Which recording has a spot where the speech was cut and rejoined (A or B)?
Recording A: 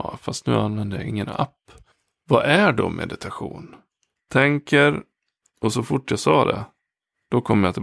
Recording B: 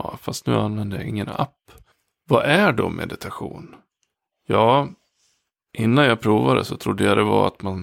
A